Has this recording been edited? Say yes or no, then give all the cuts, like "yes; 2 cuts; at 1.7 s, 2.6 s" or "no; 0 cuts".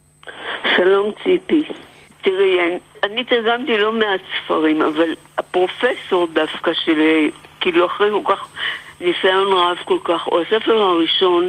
no; 0 cuts